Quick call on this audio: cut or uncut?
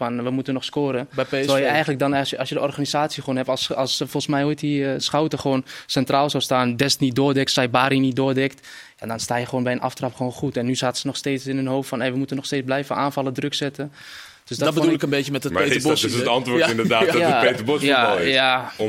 uncut